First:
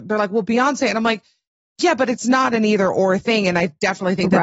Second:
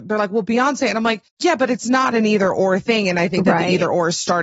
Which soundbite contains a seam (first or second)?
second